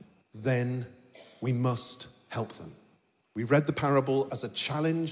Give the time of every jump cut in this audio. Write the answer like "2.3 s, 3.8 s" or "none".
3.2 s